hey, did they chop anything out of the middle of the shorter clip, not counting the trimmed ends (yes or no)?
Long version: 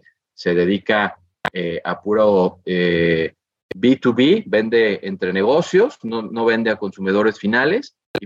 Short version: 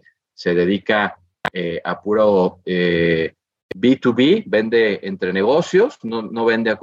no